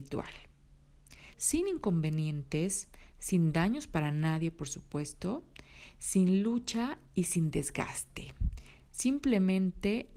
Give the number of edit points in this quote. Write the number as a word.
one